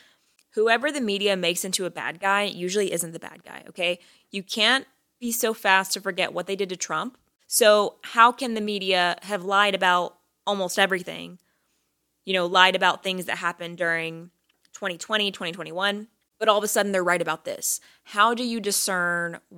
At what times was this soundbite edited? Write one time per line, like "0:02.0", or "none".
none